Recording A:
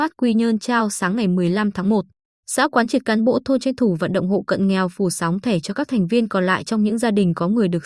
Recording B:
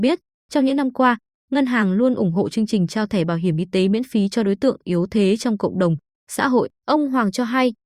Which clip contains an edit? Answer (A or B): B